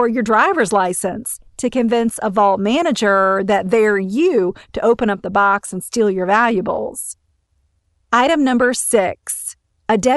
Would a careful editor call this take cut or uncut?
uncut